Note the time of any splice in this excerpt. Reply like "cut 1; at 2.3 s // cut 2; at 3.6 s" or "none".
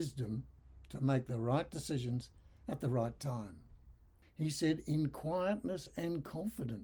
cut 1; at 4.2 s